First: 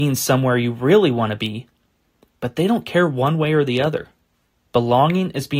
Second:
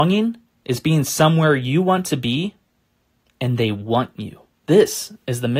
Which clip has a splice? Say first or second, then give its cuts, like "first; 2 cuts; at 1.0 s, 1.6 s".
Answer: second; 1 cut; at 4.5 s